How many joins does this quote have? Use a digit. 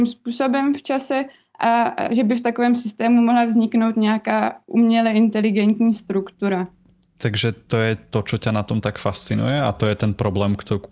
0